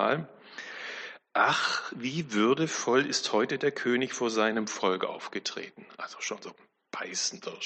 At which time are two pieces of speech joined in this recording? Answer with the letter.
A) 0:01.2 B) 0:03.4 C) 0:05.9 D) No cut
D